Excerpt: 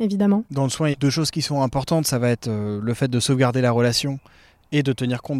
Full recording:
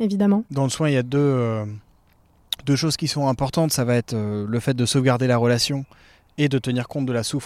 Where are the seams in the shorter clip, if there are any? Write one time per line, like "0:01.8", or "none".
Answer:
0:00.9